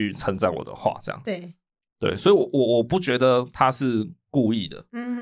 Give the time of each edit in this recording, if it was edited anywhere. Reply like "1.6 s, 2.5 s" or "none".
none